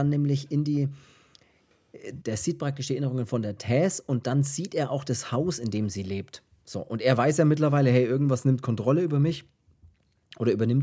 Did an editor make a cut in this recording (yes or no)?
yes